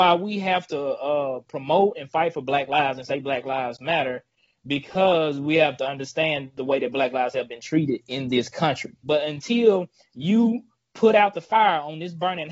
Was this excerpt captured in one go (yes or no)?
no